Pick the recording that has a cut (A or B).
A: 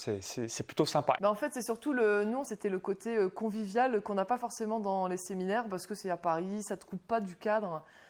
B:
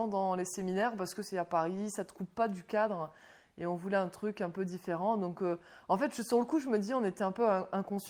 A